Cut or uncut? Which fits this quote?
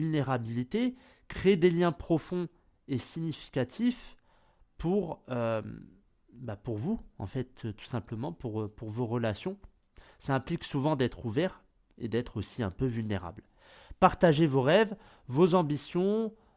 uncut